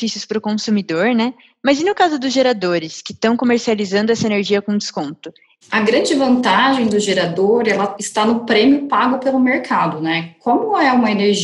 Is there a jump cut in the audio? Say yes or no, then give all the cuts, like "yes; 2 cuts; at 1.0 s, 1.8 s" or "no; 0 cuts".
yes; 1 cut; at 5.6 s